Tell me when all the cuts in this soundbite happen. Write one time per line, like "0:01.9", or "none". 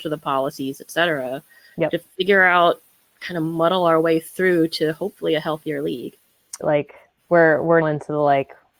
0:06.6
0:07.8